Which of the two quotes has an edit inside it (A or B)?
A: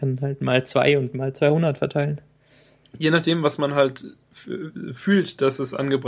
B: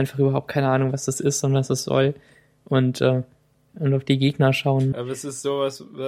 B